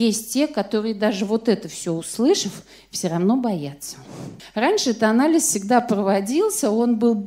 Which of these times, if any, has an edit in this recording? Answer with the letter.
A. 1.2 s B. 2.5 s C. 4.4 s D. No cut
C